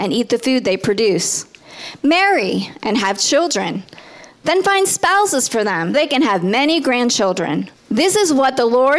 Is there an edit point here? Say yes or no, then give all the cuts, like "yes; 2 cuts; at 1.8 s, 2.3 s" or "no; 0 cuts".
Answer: yes; 2 cuts; at 5.9 s, 7.7 s